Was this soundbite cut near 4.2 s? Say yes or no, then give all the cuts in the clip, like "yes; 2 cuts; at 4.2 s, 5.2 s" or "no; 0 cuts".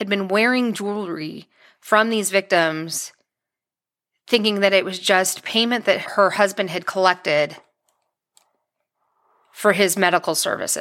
no; 1 cut; at 6.0 s